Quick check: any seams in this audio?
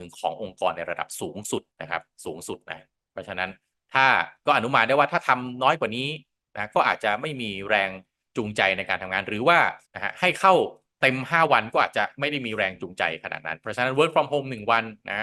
yes; 2 cuts; at 1.7 s, 9.8 s

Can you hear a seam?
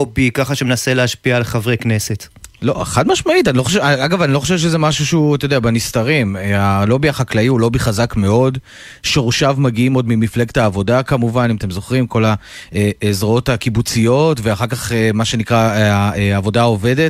no; 0 cuts

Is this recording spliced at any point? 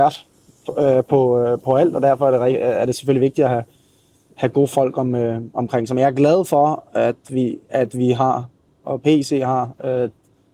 no; 0 cuts

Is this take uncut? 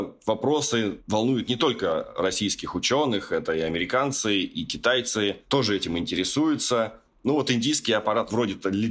yes; 0 cuts

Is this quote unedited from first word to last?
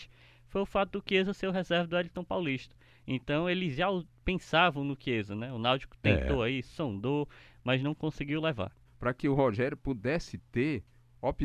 no; 1 cut; at 8.9 s

